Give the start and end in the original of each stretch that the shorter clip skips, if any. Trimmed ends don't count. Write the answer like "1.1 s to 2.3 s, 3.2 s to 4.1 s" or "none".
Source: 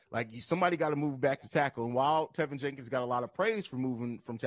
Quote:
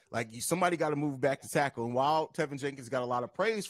none